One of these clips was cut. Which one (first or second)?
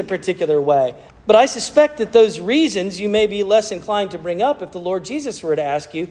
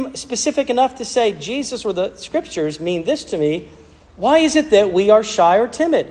first